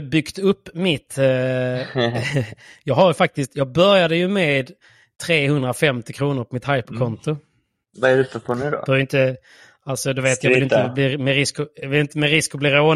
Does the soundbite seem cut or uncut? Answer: uncut